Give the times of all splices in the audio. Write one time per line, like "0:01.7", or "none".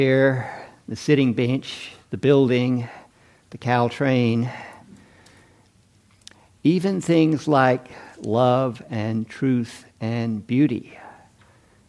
none